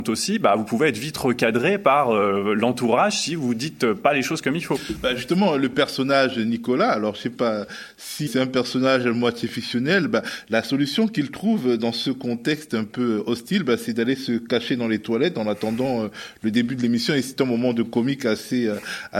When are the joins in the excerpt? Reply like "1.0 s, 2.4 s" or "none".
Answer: 8.3 s